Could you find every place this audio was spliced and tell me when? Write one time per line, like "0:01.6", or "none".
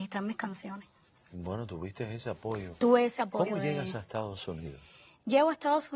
none